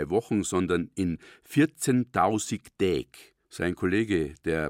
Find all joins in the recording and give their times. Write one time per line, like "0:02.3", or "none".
0:03.4